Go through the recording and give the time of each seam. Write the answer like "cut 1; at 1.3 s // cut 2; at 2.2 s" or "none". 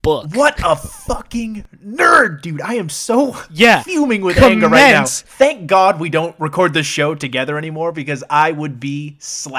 none